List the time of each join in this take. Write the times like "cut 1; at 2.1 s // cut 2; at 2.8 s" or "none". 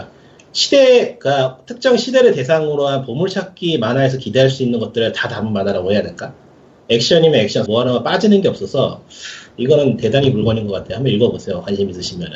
cut 1; at 7.7 s